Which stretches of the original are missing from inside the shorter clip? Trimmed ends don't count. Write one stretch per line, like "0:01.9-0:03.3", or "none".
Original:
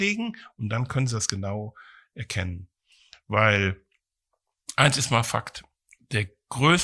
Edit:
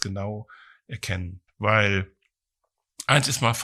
0:02.8-0:03.2